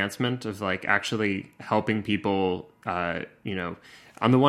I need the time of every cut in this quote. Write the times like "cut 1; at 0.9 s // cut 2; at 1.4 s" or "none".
none